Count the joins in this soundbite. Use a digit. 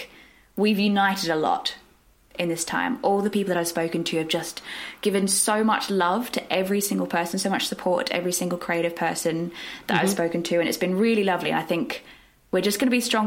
0